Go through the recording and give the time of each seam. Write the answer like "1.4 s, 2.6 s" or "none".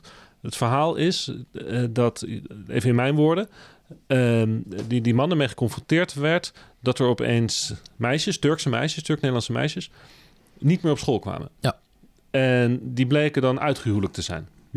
none